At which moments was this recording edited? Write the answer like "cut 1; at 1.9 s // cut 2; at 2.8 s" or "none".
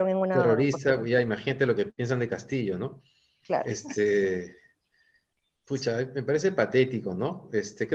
none